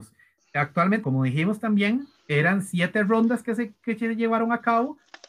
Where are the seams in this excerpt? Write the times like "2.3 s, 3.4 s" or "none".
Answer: 1.0 s